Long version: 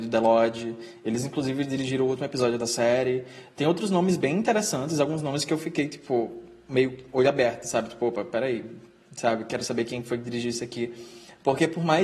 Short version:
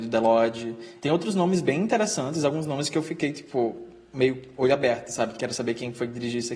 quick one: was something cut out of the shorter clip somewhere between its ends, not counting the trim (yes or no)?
yes